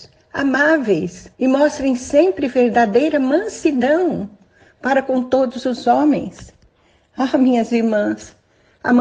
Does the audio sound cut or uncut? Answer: cut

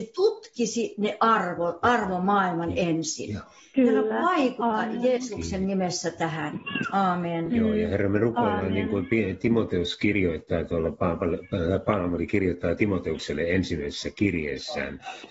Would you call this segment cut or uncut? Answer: uncut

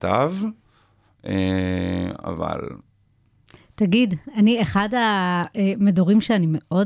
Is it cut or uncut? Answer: uncut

